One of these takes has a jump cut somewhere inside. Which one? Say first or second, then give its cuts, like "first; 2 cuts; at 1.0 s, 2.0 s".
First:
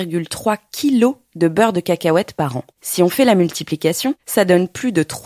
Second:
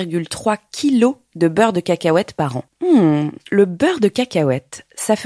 second; 1 cut; at 2.7 s